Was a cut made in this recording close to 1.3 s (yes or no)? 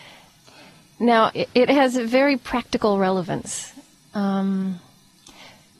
yes